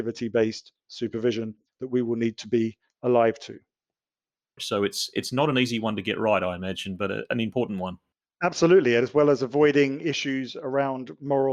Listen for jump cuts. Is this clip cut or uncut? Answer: cut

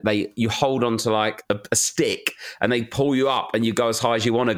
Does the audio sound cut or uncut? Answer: uncut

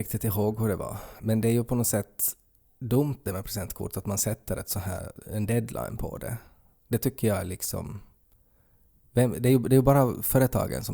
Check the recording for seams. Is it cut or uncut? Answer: uncut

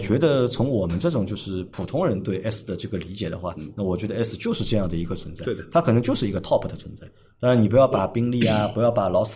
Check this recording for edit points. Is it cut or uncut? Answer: uncut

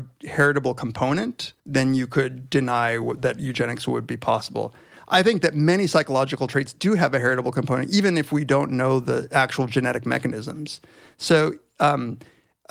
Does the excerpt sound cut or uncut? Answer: cut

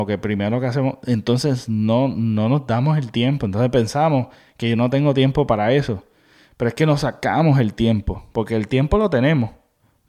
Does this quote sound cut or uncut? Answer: uncut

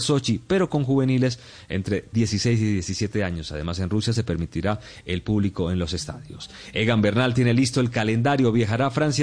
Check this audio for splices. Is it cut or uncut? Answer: uncut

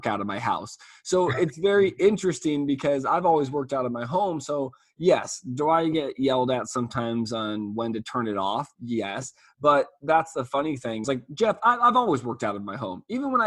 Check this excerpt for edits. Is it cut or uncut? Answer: cut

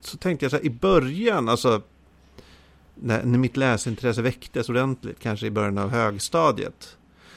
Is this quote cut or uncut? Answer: uncut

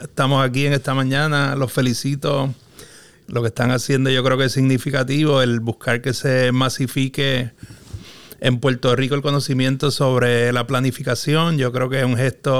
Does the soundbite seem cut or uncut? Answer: uncut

